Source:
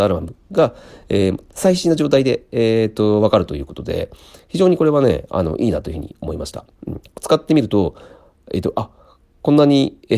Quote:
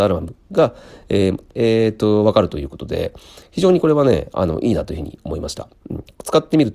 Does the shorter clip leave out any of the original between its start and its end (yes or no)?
yes